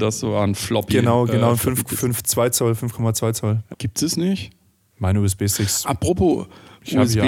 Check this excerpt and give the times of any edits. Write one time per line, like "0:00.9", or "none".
0:03.7